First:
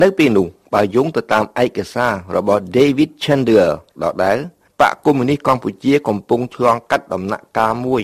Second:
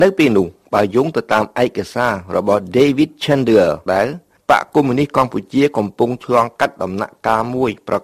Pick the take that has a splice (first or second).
second